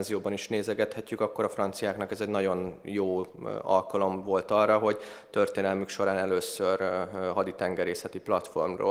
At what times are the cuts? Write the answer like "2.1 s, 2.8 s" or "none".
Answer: none